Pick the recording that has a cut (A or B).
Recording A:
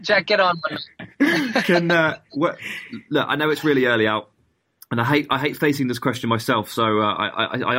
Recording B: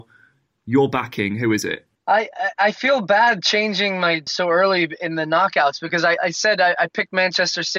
B